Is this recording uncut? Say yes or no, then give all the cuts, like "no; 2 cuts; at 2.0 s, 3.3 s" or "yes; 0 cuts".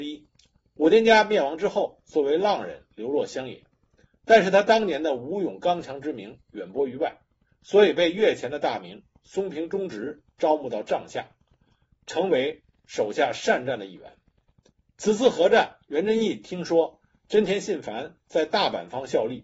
yes; 0 cuts